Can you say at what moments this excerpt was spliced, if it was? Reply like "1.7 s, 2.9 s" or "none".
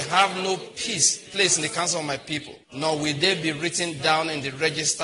2.6 s